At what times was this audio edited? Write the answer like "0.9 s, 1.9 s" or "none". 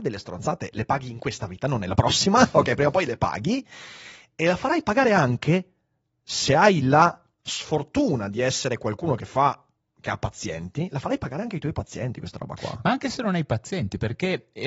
none